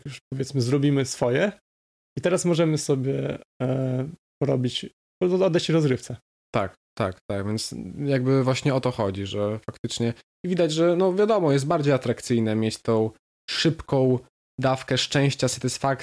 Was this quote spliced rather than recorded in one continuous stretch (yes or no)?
no